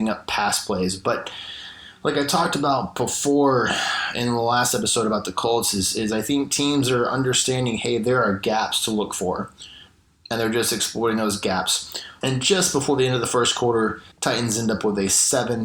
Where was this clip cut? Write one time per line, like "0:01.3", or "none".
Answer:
0:12.2
0:14.1